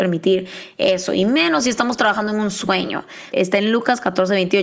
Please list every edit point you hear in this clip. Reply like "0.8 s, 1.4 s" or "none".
3.3 s